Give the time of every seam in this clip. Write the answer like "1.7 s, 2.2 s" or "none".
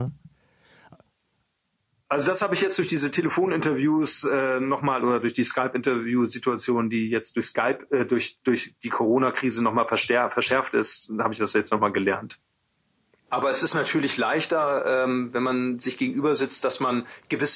13.3 s